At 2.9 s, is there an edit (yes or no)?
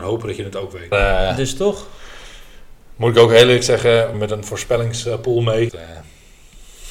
no